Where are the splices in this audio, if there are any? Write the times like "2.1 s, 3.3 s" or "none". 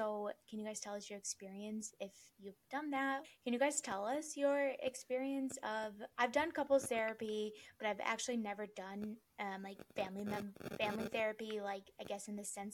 3.2 s